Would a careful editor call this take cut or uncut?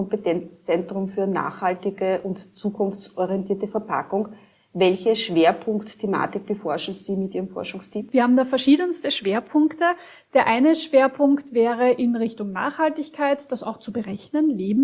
uncut